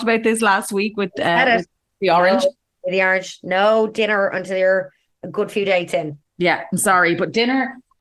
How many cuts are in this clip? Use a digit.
0